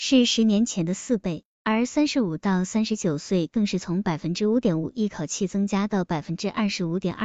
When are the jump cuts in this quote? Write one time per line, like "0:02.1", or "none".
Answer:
0:04.8